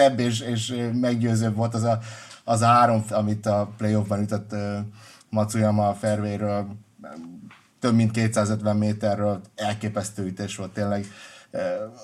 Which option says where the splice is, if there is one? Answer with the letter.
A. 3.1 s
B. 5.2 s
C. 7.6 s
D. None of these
A